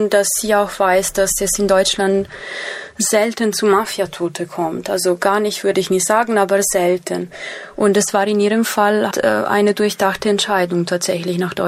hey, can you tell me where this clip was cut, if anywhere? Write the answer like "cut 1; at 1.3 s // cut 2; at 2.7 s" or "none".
cut 1; at 9.1 s